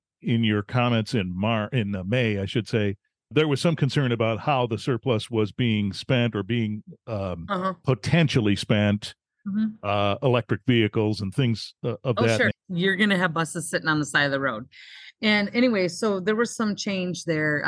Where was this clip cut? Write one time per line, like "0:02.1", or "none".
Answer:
0:12.5